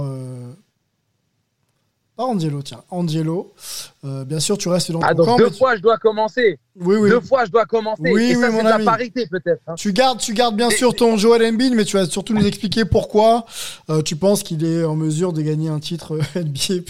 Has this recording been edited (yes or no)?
no